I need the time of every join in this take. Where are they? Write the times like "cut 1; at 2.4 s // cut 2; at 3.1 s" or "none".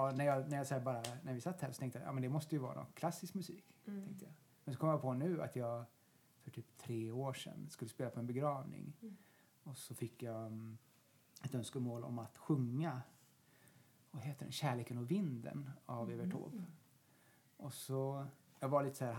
none